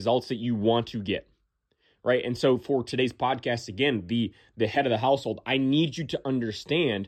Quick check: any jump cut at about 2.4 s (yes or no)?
no